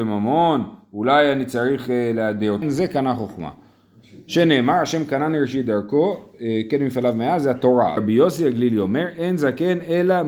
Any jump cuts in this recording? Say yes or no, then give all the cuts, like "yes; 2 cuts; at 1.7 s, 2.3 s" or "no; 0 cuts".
yes; 2 cuts; at 2.6 s, 8.0 s